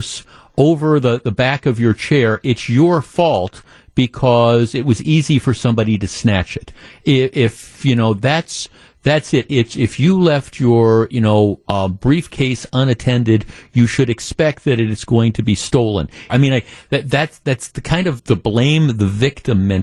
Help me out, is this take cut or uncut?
cut